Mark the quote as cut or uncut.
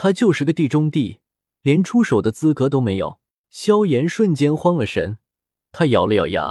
cut